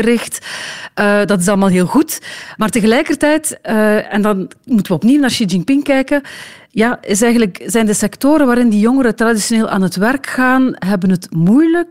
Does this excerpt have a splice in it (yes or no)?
no